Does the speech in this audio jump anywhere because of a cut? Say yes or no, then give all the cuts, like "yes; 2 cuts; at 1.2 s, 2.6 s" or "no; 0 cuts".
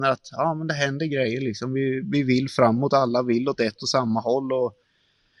no; 0 cuts